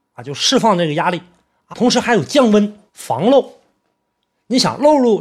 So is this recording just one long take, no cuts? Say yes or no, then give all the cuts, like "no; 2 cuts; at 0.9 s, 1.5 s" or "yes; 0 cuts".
no; 2 cuts; at 1.7 s, 2.9 s